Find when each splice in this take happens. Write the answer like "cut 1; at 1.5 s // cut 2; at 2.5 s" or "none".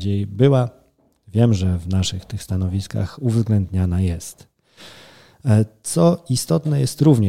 none